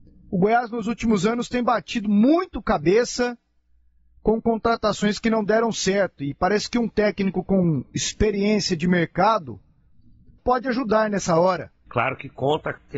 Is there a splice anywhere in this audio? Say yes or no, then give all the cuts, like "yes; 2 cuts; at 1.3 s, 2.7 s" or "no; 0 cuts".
yes; 2 cuts; at 10.4 s, 11.9 s